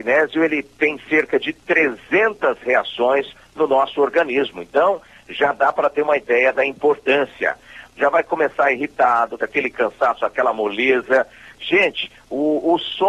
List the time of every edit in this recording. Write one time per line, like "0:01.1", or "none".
0:07.9
0:09.4